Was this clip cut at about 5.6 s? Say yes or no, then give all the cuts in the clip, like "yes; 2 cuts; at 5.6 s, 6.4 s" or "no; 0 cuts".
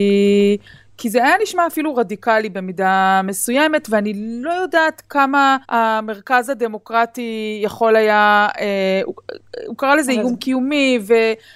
yes; 1 cut; at 5.6 s